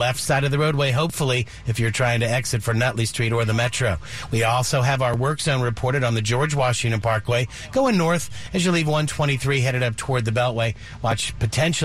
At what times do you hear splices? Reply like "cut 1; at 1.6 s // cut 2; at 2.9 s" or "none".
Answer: none